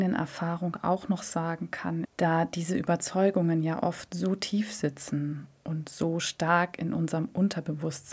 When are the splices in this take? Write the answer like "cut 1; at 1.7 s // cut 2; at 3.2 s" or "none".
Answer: cut 1; at 2.0 s